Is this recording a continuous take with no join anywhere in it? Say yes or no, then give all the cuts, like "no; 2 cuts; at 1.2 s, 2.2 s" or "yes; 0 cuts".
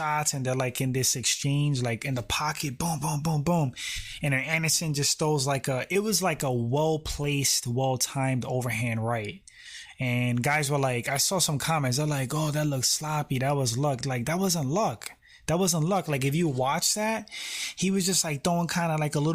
yes; 0 cuts